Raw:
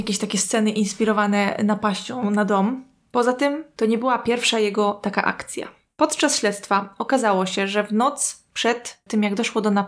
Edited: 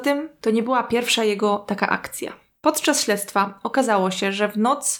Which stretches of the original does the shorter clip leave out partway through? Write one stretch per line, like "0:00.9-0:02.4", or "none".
none